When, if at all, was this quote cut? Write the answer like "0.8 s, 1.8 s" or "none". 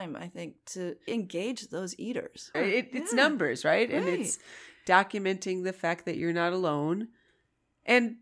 1.1 s, 2.5 s